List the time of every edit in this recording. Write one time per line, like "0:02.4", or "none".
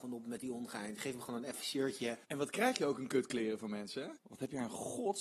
0:02.2
0:04.2